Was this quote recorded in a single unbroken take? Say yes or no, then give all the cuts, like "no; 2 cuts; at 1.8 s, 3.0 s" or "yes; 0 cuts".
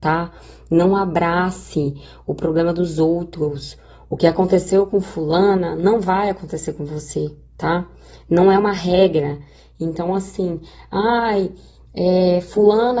yes; 0 cuts